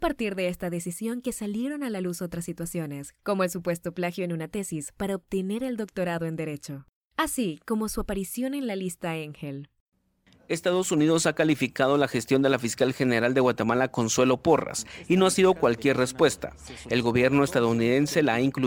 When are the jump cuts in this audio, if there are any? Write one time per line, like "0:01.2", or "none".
none